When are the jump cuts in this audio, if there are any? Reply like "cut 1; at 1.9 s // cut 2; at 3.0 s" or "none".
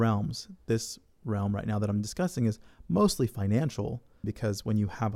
cut 1; at 4.2 s